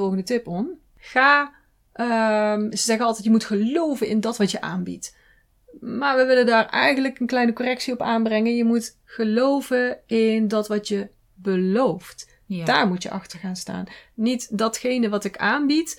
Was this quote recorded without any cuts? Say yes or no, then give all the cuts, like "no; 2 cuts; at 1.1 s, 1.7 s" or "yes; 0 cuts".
yes; 0 cuts